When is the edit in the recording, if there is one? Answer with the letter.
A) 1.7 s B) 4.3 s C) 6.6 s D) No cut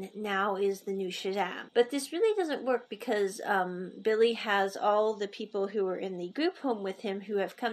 A